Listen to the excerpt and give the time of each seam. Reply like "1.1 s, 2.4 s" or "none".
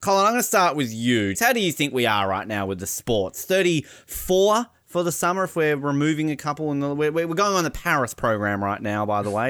1.3 s